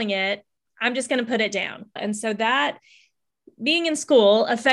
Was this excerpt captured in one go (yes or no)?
no